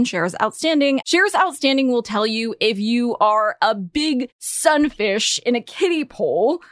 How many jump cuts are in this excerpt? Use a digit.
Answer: 1